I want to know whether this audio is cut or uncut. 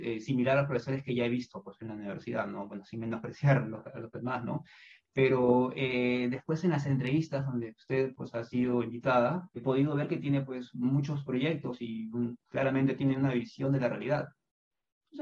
cut